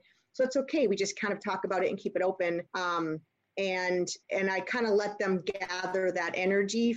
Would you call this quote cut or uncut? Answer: cut